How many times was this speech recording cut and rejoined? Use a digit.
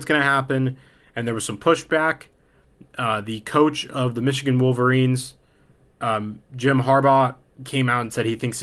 0